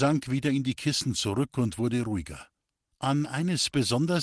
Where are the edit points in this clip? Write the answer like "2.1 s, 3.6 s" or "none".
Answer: 2.9 s